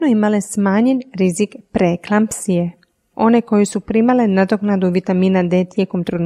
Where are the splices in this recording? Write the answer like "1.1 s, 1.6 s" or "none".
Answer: 3.1 s